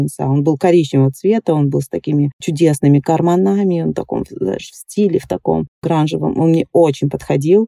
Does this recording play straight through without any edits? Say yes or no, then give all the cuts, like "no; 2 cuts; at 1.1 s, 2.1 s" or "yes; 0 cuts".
yes; 0 cuts